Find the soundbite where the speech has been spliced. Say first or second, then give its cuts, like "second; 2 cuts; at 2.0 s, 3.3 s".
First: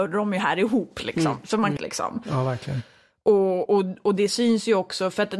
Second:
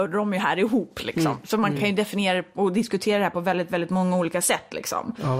first; 2 cuts; at 1.8 s, 3.7 s